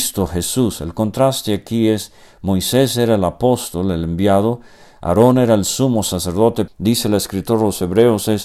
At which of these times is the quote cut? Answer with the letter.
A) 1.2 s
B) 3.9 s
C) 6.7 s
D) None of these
C